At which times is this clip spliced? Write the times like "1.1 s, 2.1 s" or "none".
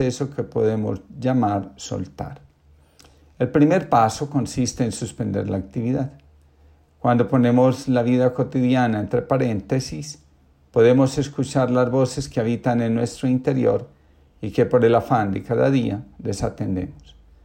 none